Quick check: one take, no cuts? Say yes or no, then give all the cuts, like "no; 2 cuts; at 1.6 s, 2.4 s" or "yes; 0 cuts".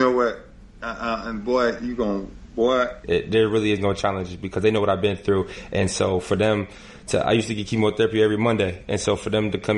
no; 1 cut; at 3.0 s